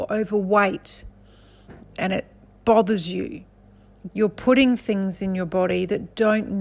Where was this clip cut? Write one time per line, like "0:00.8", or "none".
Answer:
0:01.8
0:04.1